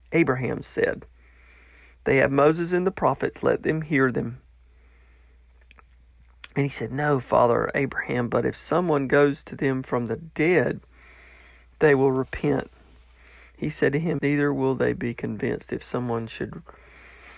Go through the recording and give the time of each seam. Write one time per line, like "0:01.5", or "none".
0:14.2